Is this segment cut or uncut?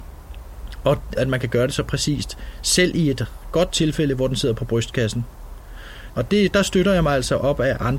cut